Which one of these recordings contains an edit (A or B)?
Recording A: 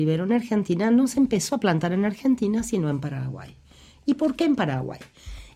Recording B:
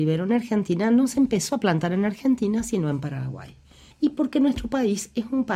B